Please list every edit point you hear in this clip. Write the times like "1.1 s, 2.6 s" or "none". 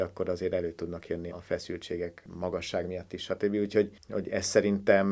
1.3 s